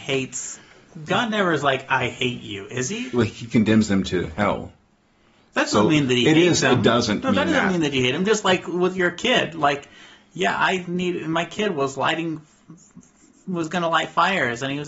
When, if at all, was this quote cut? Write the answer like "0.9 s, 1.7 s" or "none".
none